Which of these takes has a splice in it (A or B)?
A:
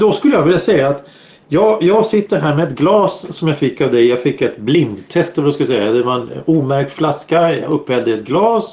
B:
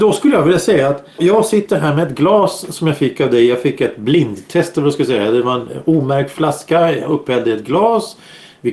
B